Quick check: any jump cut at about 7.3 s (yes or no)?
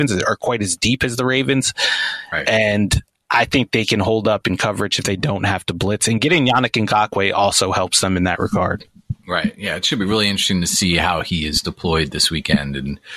no